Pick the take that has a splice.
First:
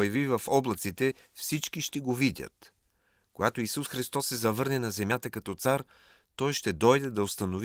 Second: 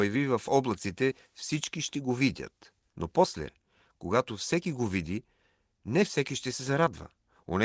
second; 1 cut; at 2.9 s

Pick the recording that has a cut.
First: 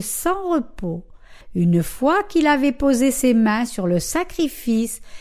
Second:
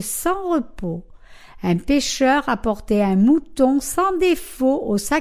first; 1 cut; at 1.4 s

